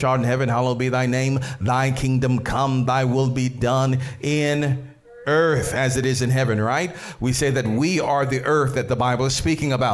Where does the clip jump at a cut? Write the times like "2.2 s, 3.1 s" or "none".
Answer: none